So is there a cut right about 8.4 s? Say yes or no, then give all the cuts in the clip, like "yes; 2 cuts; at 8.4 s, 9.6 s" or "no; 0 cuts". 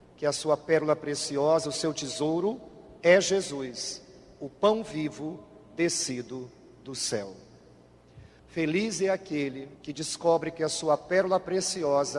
yes; 2 cuts; at 8.4 s, 9.7 s